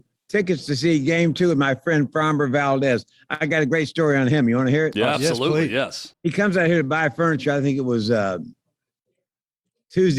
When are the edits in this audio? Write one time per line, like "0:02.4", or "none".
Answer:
0:06.1